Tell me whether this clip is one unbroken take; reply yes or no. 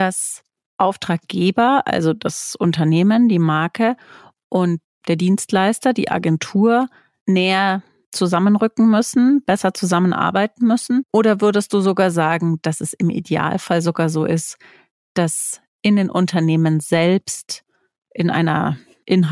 yes